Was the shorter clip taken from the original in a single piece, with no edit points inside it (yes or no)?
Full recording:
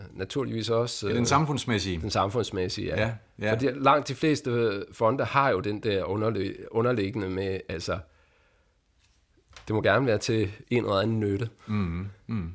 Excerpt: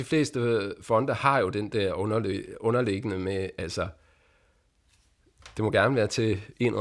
yes